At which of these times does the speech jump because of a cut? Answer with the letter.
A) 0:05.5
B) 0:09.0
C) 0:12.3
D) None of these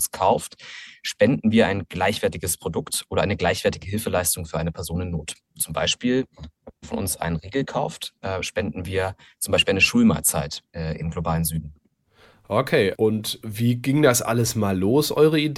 D